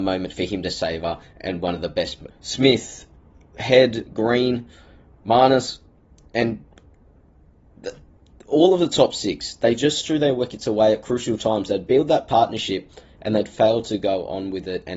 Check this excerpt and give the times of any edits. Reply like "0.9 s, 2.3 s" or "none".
2.3 s